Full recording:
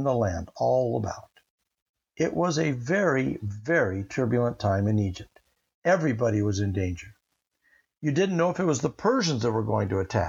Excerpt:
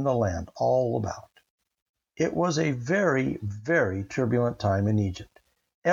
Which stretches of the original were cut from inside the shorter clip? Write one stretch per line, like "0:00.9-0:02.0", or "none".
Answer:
none